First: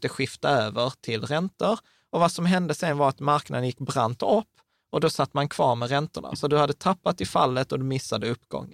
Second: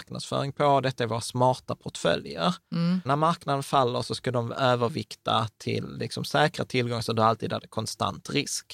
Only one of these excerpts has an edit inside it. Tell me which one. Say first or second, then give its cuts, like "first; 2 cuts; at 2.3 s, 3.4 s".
second; 1 cut; at 3.1 s